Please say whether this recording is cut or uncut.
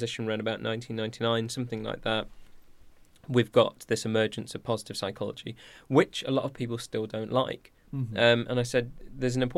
uncut